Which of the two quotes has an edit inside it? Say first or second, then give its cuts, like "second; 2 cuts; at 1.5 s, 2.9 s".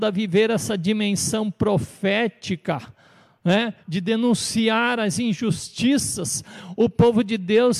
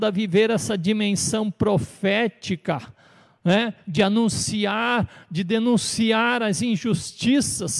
first; 1 cut; at 3.8 s